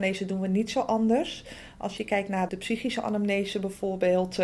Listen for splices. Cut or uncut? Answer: cut